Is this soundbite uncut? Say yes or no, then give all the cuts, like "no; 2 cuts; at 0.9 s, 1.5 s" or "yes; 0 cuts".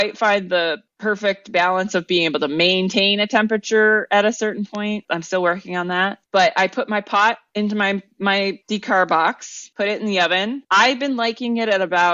yes; 0 cuts